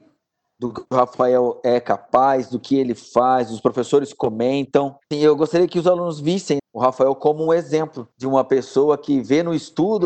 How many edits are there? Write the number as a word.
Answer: three